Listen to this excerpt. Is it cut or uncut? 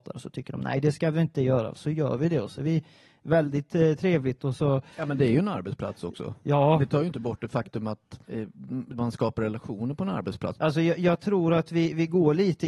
cut